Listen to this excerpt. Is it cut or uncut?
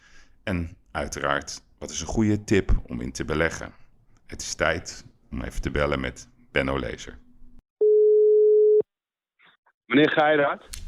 uncut